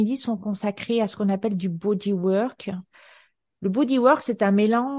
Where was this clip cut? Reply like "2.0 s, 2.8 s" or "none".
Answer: none